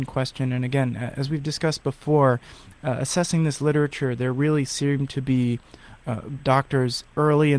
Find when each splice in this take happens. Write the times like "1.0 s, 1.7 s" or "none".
6.4 s